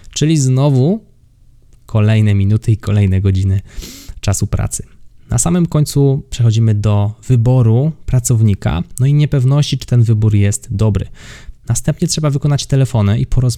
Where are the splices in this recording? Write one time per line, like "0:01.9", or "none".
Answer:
0:11.6